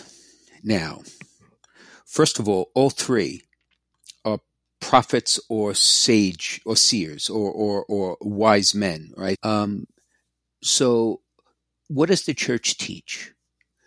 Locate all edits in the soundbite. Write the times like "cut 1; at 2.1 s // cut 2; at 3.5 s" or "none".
cut 1; at 9.3 s